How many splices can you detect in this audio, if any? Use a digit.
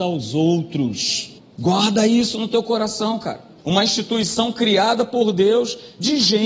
2